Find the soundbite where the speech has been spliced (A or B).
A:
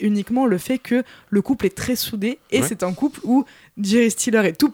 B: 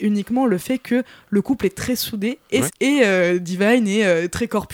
B